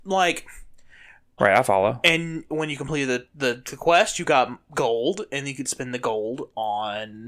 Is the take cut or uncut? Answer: cut